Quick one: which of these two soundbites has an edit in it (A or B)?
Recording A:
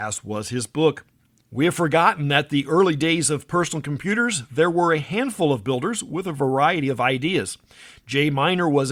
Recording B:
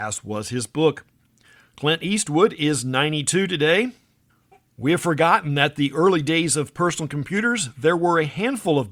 A